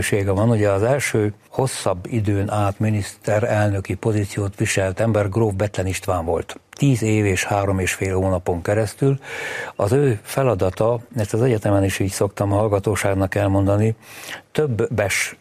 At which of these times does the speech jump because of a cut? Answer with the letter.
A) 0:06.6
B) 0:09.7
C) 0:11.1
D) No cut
D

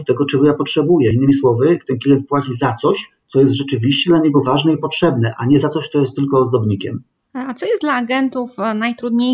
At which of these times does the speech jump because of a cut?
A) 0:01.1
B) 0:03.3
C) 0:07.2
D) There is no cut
D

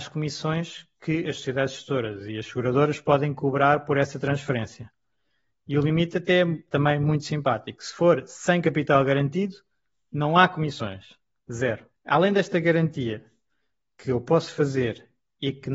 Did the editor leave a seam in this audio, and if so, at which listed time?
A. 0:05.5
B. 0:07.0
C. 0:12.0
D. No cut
C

